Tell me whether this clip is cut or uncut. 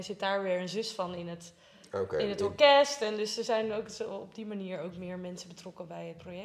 uncut